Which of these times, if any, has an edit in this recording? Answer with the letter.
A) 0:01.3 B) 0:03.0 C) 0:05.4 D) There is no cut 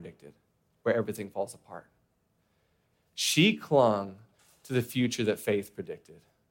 D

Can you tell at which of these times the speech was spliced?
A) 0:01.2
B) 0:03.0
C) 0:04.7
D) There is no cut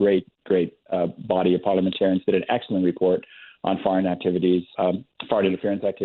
C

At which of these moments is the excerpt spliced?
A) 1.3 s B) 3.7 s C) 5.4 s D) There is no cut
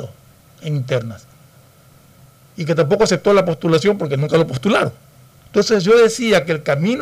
C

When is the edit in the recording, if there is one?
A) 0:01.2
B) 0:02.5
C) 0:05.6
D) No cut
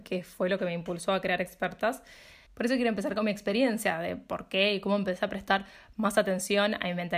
B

